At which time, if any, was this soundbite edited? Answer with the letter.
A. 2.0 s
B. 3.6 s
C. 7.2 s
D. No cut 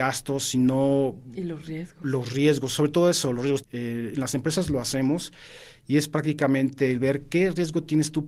B